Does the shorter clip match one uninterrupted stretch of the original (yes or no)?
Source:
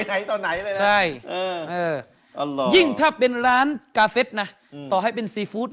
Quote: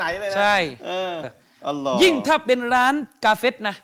no